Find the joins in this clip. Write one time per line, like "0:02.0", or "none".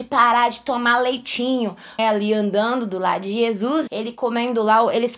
0:02.0
0:03.9